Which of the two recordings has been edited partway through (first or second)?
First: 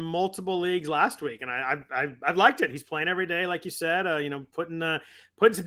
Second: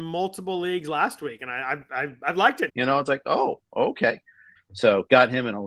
second